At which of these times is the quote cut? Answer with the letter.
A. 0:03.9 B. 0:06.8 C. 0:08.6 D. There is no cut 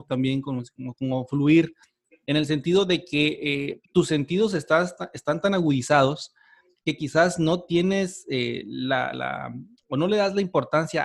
A